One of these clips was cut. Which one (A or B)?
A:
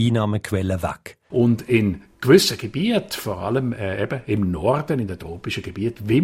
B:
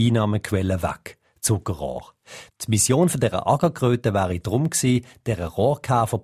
A